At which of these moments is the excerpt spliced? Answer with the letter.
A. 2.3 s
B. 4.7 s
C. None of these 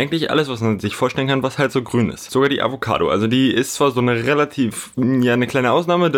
C